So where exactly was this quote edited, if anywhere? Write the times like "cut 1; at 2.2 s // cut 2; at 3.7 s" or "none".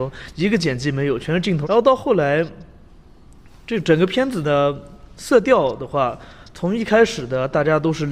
cut 1; at 1.6 s